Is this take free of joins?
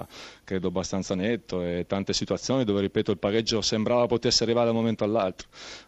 yes; 0 cuts

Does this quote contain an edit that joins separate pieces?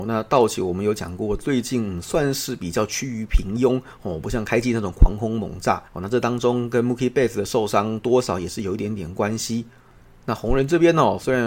yes; 1 cut; at 5.9 s

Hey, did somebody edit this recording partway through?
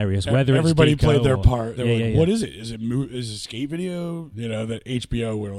yes; 2 cuts; at 1.8 s, 4.3 s

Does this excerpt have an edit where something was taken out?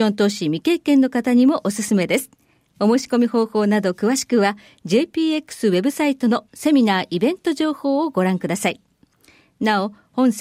no; 0 cuts

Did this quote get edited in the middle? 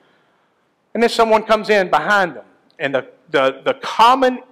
no; 0 cuts

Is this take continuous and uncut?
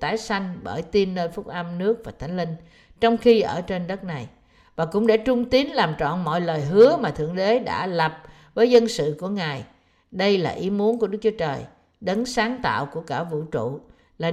yes; 0 cuts

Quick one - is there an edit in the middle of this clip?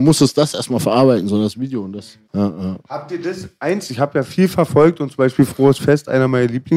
yes; 1 cut; at 2.3 s

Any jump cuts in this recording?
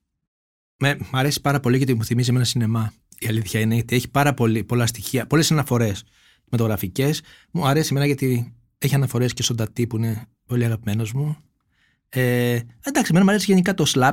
no; 0 cuts

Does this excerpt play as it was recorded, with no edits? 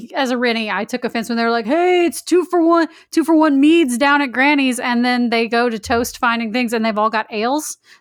yes; 0 cuts

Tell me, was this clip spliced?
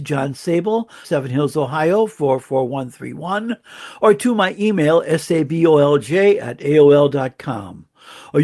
yes; 1 cut; at 1.0 s

